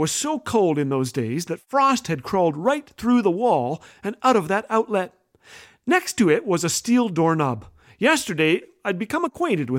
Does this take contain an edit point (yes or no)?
no